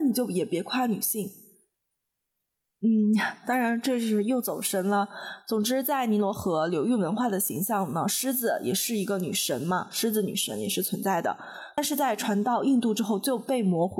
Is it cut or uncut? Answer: uncut